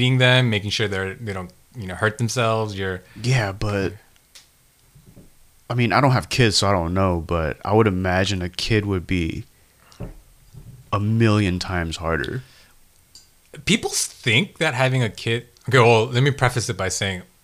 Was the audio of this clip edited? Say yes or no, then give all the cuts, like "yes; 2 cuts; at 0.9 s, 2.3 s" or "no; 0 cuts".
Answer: no; 0 cuts